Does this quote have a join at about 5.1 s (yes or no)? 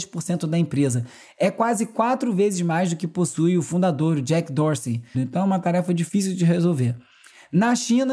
yes